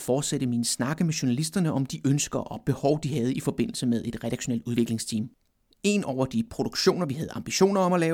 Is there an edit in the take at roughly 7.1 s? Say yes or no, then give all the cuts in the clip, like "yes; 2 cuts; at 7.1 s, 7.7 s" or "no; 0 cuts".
no; 1 cut; at 5.7 s